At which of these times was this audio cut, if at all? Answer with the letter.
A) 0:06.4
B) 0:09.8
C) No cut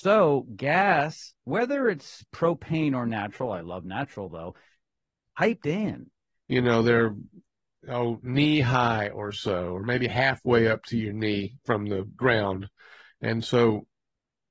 A